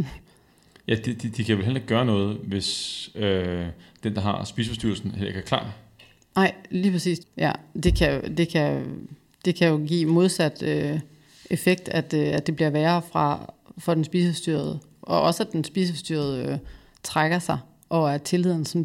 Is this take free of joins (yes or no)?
no